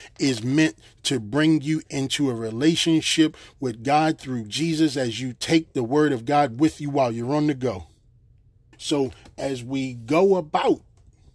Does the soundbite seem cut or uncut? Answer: cut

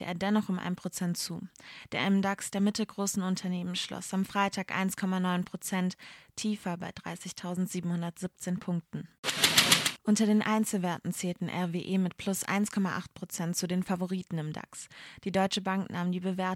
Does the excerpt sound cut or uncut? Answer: uncut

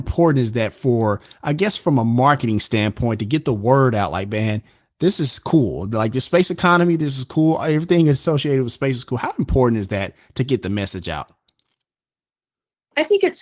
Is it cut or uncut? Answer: uncut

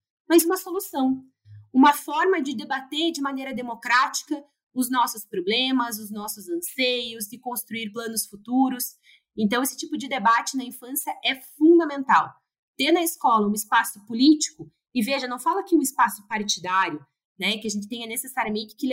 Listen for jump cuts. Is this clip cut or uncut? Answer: uncut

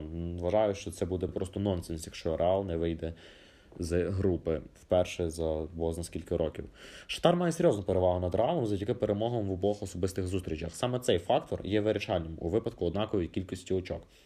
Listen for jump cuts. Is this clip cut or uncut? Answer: uncut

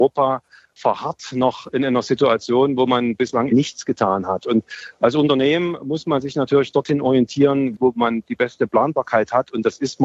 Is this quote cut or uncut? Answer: cut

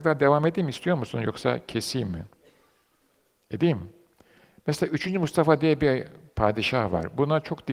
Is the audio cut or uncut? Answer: uncut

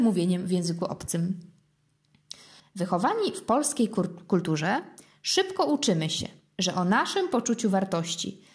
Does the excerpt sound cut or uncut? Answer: cut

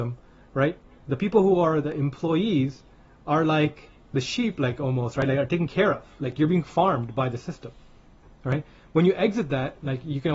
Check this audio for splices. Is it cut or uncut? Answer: uncut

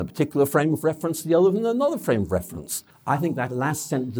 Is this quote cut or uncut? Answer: cut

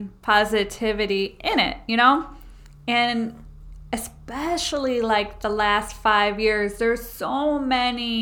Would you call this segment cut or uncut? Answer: uncut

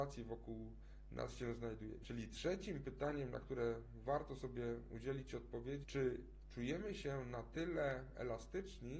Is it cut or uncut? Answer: cut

